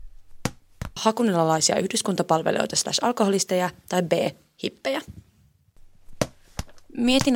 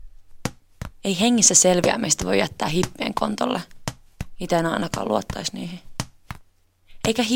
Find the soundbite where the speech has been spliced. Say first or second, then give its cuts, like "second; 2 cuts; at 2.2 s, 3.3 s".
first; 1 cut; at 1.0 s